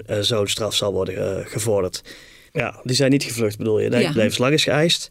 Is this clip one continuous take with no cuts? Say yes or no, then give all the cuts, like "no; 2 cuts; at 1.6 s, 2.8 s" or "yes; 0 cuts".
no; 2 cuts; at 2.5 s, 4.2 s